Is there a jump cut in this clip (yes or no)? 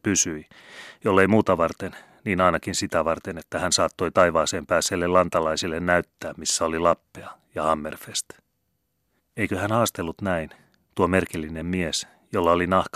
no